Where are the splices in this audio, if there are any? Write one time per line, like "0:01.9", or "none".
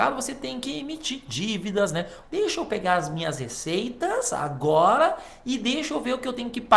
0:02.2

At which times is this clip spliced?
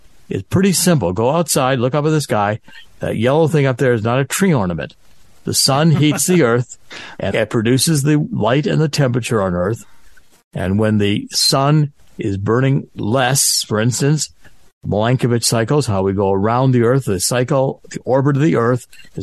0:07.3

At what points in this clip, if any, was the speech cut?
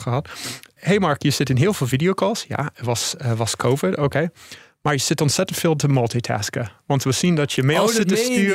none

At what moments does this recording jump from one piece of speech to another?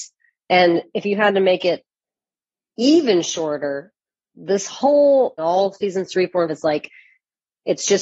0:05.4
0:06.5

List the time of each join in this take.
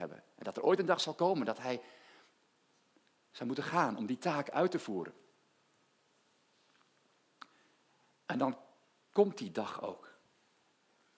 none

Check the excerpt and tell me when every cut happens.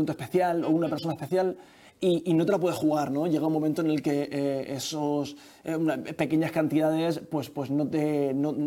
none

